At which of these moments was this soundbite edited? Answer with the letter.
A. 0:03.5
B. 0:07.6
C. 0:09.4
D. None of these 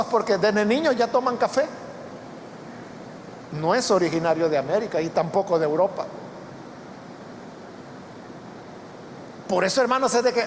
A